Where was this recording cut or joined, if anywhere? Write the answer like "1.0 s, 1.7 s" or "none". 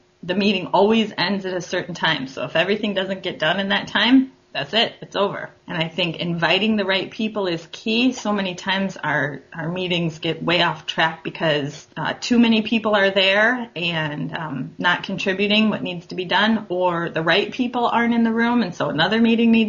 none